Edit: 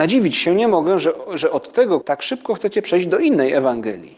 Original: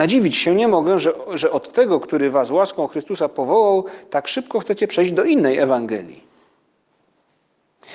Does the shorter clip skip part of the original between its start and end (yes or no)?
yes